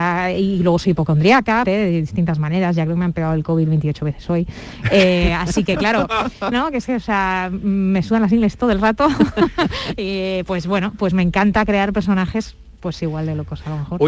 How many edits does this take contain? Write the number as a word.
two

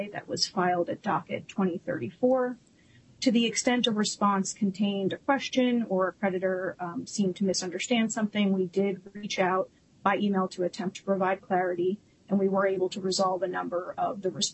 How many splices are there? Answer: zero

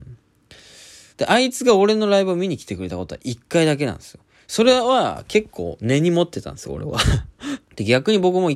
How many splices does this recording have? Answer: two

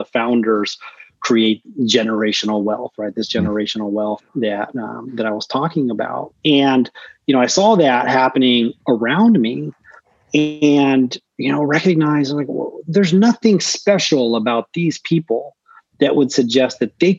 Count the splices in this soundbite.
one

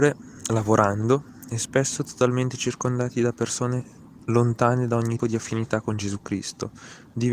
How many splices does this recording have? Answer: one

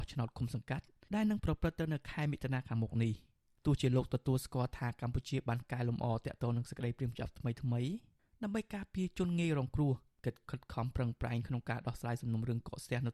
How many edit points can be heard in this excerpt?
zero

